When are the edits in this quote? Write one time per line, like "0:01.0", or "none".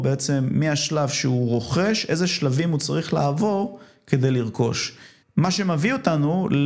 0:05.2